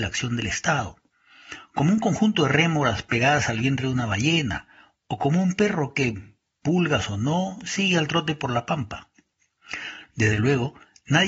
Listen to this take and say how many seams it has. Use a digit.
1